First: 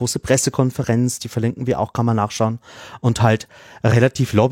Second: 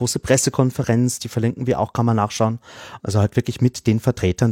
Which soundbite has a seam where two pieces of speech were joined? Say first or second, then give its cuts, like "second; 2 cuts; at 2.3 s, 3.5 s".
second; 1 cut; at 3.0 s